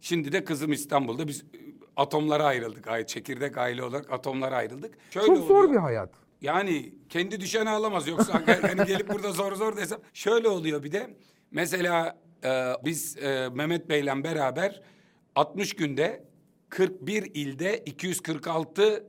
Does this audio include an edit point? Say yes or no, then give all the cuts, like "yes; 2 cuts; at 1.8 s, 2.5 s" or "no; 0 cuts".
yes; 2 cuts; at 10.1 s, 12.8 s